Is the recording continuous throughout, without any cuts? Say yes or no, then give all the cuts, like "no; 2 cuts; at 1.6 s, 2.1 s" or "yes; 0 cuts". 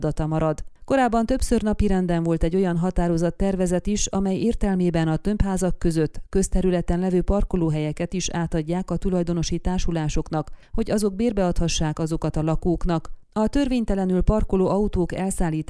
no; 1 cut; at 13.2 s